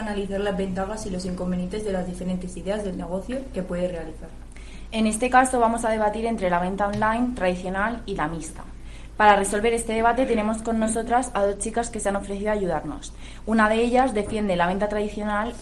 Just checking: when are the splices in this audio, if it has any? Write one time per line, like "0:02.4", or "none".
none